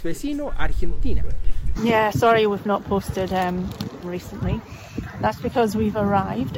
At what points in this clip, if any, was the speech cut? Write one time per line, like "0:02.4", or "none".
0:01.7
0:04.0